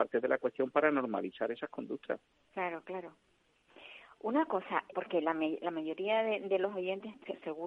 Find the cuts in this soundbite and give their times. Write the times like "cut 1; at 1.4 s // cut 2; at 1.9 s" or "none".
cut 1; at 4.9 s